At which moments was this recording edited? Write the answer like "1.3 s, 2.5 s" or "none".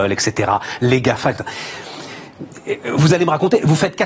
none